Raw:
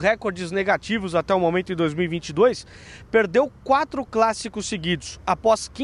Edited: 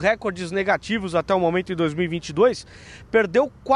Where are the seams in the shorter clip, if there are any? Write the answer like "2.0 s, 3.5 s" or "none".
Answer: none